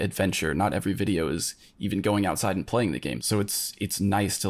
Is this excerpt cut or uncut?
cut